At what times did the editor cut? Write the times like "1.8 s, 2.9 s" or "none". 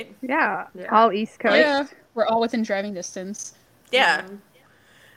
none